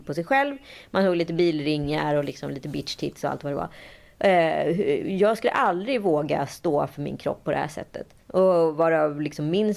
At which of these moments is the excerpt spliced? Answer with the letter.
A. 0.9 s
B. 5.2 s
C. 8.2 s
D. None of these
C